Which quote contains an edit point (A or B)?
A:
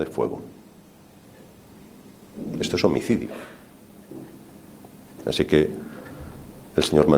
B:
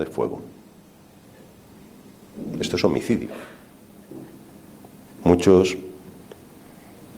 B